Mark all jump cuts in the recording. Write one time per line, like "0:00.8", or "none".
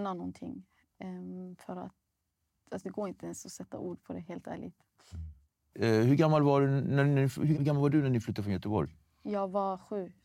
0:02.8
0:05.7
0:07.5